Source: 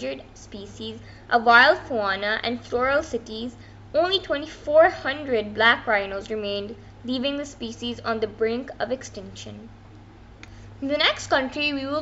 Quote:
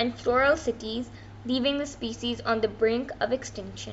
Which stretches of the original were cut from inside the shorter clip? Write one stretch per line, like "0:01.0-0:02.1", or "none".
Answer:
0:03.9-0:07.0